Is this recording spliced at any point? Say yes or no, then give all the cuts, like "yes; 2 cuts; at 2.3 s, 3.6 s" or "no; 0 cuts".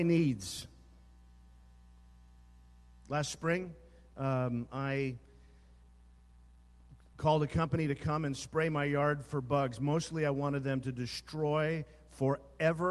no; 0 cuts